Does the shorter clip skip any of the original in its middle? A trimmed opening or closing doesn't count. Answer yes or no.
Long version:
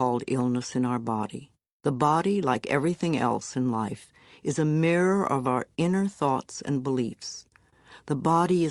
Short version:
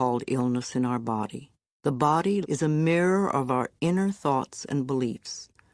yes